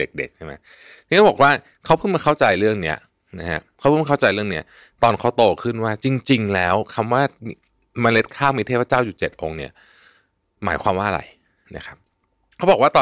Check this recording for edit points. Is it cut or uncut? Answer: uncut